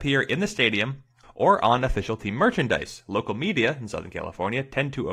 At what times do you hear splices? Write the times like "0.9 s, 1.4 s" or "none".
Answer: 1.2 s